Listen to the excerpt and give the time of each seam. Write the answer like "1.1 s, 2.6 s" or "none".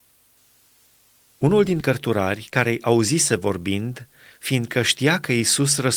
1.2 s